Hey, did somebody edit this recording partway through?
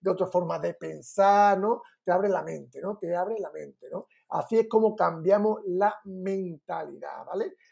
no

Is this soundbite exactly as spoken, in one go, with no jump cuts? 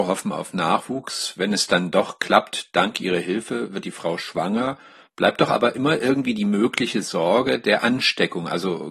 yes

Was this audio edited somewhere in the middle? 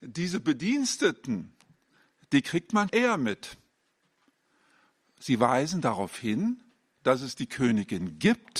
yes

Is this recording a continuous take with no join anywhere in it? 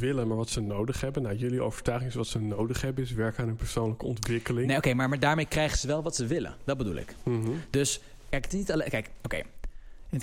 yes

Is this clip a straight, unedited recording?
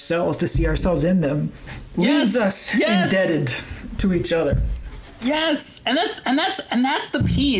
yes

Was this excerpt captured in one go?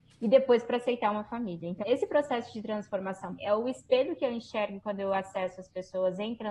no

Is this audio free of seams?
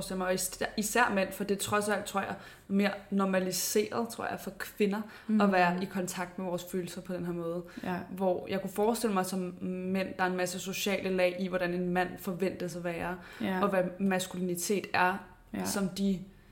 yes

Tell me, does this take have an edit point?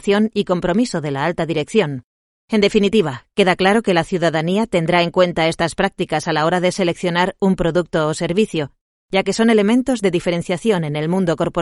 yes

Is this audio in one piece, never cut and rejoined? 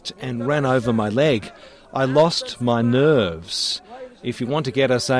yes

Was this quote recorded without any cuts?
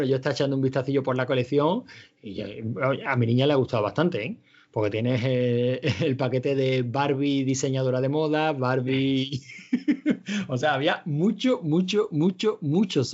yes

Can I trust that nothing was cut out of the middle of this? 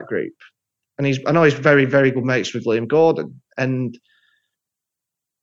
yes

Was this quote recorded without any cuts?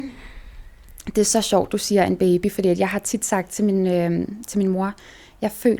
yes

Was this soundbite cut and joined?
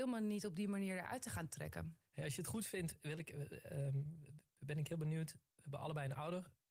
no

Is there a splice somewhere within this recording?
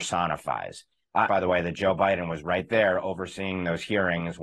yes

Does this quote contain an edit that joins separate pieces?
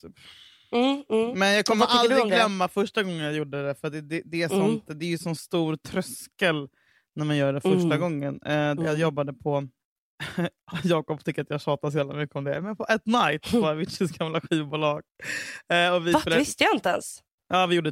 yes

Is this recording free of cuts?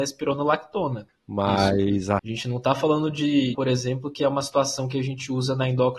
no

